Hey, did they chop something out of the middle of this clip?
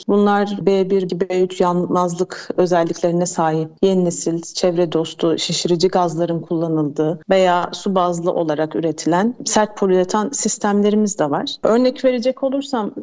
yes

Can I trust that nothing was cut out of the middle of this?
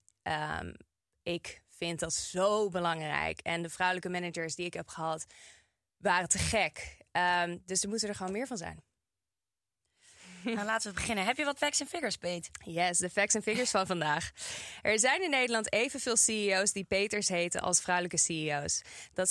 no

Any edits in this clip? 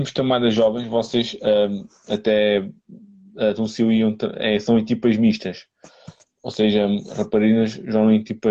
no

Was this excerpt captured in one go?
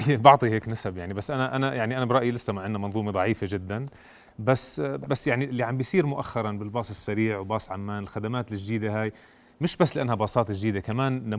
yes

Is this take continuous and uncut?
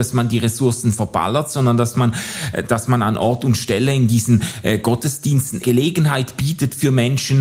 no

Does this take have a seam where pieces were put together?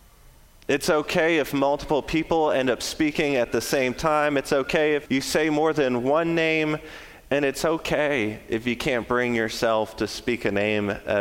yes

